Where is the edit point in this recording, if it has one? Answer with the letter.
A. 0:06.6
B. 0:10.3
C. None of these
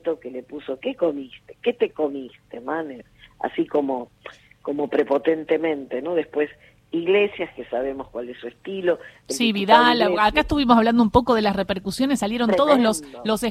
C